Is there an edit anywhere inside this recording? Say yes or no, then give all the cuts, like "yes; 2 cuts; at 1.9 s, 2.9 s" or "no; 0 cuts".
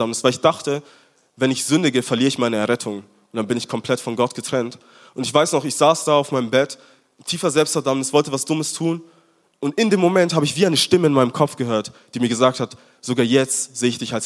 no; 0 cuts